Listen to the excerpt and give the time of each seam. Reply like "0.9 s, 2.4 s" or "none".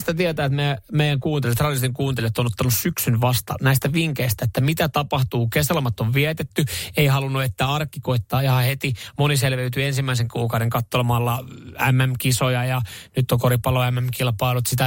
none